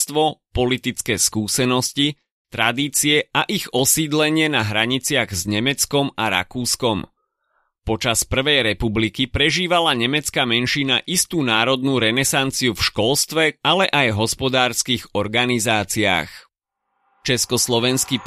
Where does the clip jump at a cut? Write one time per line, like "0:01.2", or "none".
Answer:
0:13.6